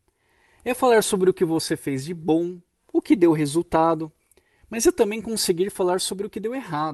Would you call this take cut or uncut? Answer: uncut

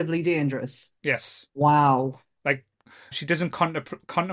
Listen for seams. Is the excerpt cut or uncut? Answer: cut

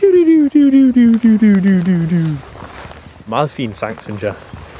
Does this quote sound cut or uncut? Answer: cut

